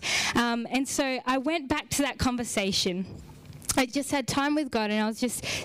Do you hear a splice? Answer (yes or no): no